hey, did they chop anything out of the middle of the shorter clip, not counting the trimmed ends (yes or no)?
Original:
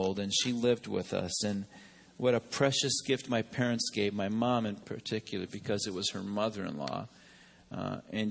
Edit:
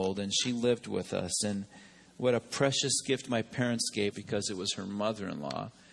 yes